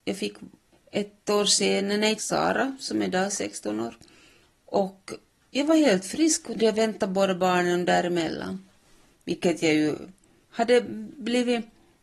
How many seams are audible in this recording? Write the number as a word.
two